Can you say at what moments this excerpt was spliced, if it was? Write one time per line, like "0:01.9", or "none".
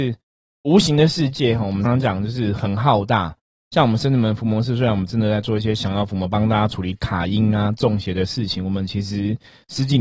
0:01.9